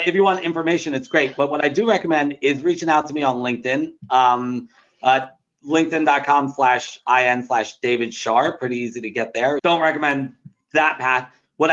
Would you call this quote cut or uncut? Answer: cut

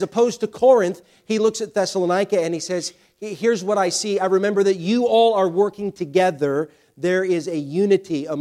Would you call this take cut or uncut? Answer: uncut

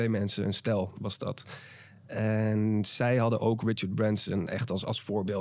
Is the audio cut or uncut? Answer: uncut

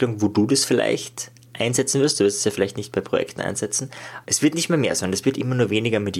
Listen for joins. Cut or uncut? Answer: cut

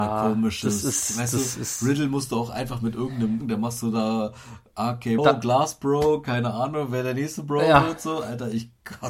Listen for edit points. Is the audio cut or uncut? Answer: cut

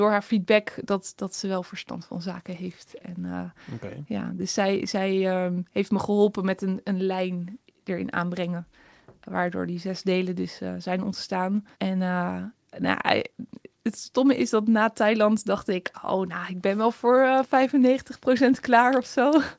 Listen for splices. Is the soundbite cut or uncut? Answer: cut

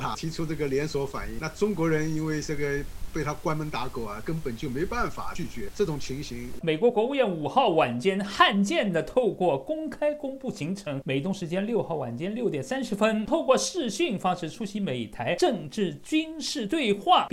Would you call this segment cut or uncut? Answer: cut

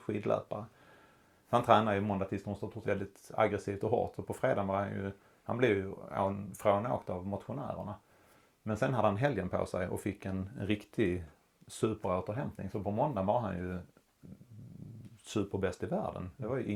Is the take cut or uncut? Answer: cut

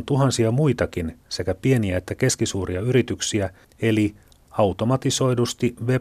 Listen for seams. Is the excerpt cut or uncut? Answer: cut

